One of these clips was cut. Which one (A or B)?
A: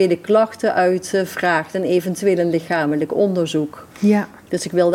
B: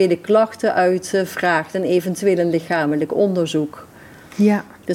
A